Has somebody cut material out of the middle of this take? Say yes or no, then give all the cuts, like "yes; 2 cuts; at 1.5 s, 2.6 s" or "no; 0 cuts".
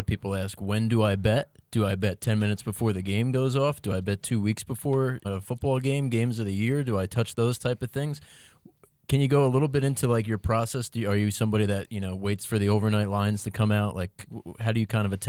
yes; 1 cut; at 5.2 s